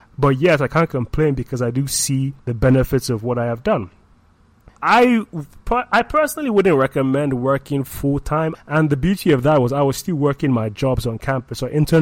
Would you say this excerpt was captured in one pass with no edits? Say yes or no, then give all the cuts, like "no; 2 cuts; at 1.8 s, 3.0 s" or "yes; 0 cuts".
no; 3 cuts; at 2.4 s, 4.8 s, 8.5 s